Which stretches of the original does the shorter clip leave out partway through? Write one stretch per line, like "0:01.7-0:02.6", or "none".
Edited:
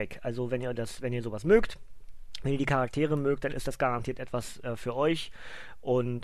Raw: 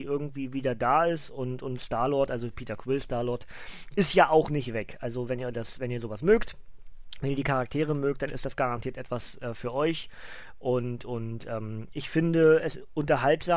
none